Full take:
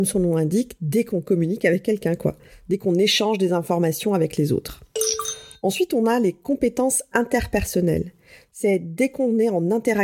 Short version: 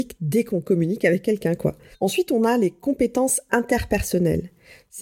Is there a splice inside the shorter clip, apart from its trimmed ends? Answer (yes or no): yes